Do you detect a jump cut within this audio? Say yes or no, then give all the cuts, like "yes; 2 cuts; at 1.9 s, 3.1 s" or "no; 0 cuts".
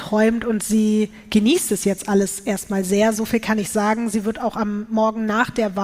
no; 0 cuts